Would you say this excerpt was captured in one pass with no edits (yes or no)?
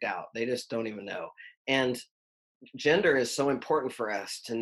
yes